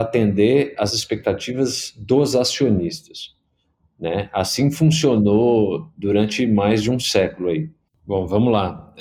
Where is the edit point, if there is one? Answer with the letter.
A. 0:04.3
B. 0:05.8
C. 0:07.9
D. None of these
C